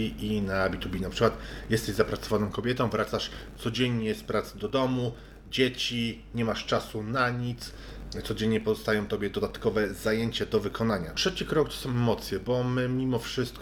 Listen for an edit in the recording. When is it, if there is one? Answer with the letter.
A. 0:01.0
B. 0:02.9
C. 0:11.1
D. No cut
C